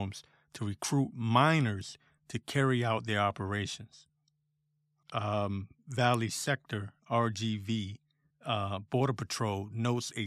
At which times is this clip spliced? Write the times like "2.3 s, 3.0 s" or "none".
5.0 s, 8.3 s